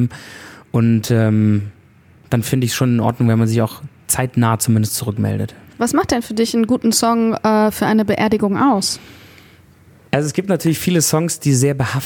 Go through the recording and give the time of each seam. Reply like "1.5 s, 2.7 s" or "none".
none